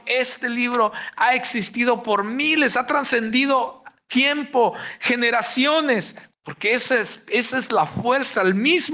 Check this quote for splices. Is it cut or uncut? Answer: cut